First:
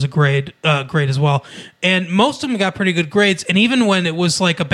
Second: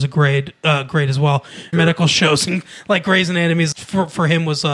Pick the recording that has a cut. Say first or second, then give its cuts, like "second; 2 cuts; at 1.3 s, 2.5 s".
second; 2 cuts; at 1.7 s, 3.7 s